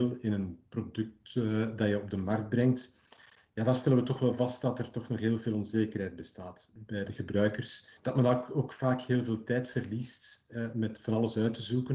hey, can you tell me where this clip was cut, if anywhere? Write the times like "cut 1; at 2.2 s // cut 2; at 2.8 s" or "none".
cut 1; at 8.0 s